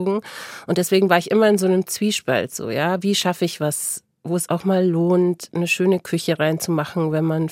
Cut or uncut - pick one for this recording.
cut